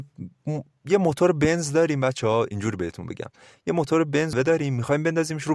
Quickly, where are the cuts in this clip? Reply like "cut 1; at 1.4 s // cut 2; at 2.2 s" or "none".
cut 1; at 4.3 s